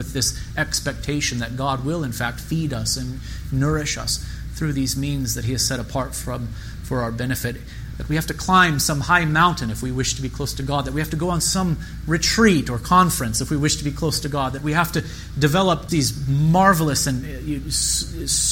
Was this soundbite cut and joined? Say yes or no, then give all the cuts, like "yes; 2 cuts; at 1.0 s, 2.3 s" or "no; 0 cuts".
yes; 2 cuts; at 7.9 s, 15.9 s